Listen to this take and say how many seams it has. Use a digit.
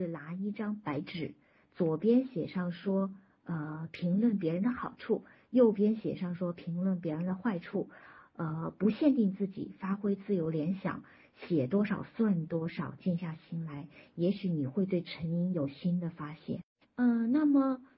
2